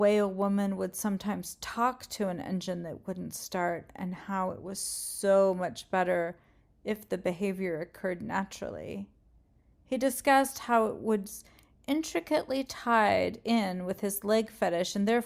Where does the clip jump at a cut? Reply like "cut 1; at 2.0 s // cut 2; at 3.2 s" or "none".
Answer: none